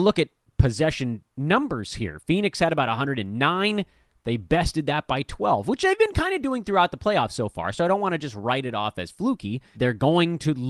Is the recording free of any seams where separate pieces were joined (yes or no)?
no